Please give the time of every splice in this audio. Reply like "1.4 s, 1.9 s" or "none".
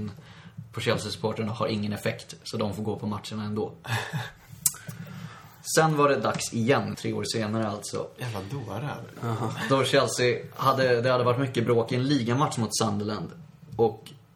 6.9 s